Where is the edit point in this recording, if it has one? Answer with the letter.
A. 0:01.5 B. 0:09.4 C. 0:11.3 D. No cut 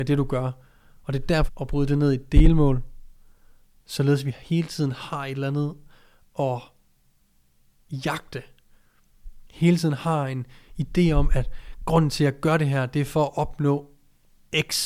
A